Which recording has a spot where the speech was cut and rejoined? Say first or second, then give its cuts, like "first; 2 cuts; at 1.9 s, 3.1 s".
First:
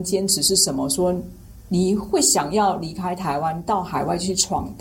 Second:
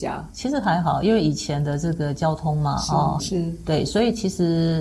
second; 1 cut; at 3.2 s